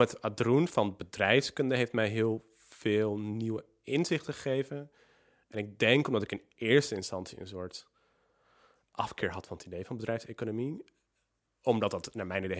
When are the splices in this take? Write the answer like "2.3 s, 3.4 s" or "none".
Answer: none